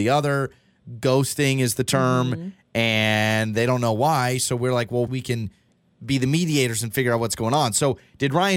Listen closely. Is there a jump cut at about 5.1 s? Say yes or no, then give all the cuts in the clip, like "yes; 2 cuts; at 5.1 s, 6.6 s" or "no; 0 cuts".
yes; 1 cut; at 5.1 s